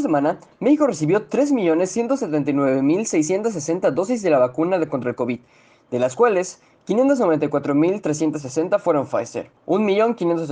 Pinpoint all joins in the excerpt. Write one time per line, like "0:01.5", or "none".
0:09.6

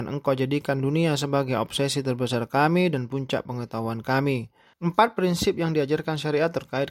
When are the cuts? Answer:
0:04.7

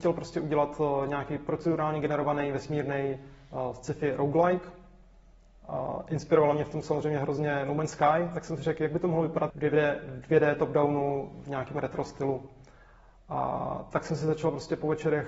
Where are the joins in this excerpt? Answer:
0:09.5

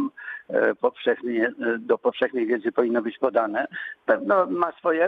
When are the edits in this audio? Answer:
0:04.0

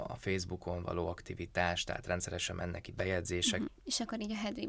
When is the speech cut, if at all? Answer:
0:03.7

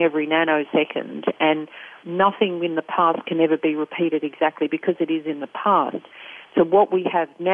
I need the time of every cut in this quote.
none

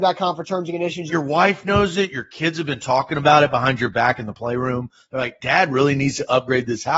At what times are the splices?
0:01.1
0:05.4

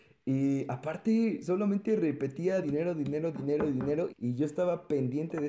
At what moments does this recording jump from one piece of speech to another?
0:02.6
0:04.1

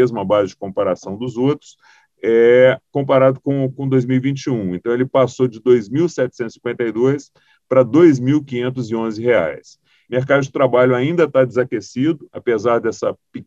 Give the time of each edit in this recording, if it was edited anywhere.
0:10.1

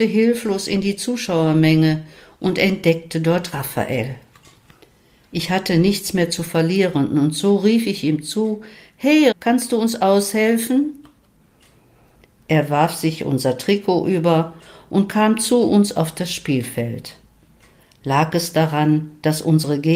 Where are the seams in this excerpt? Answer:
0:09.3

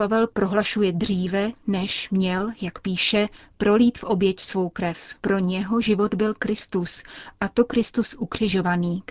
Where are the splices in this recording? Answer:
0:05.2

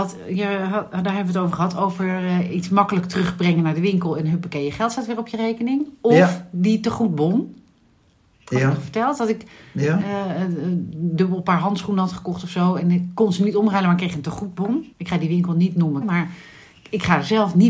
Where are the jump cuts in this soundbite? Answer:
0:14.9
0:16.0

